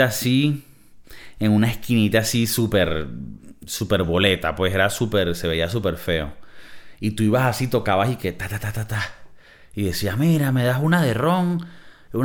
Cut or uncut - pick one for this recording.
uncut